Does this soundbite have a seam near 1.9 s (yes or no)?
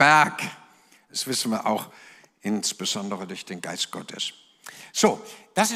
no